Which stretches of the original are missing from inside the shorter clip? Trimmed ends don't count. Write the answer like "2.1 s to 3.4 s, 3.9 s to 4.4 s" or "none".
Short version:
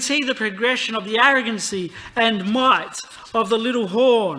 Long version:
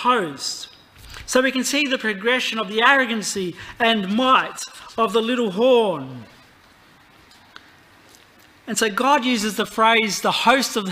none